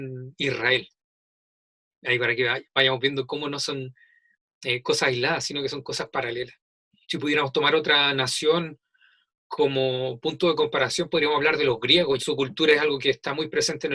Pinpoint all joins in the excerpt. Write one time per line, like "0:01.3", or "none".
0:07.0
0:12.2

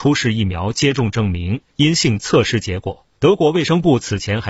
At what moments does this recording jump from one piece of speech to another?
0:03.1

